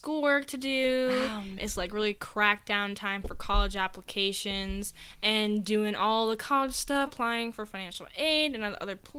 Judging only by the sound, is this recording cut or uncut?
cut